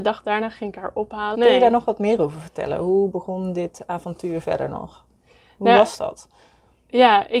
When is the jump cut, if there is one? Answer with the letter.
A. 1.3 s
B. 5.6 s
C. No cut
A